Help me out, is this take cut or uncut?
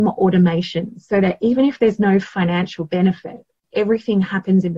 cut